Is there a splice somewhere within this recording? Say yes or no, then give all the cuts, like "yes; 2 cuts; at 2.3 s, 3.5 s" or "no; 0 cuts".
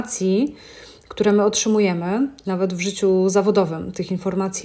yes; 1 cut; at 2.4 s